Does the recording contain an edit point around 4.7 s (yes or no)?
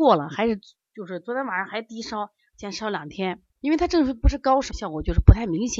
yes